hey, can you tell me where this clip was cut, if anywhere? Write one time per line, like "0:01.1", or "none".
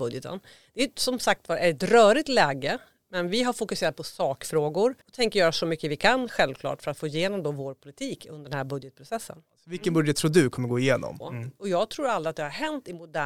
0:05.0
0:11.2